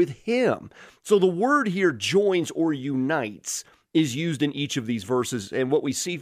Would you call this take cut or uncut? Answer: uncut